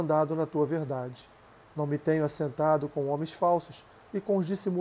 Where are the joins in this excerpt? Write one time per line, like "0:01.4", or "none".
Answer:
none